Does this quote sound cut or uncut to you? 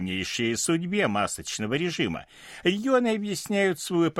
uncut